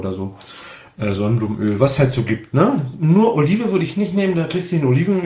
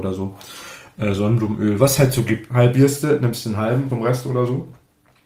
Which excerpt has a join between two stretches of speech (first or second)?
second